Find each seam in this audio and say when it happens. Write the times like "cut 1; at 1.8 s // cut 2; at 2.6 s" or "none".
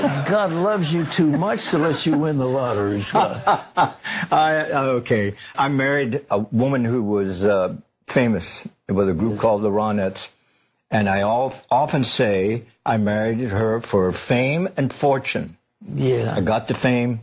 cut 1; at 5.5 s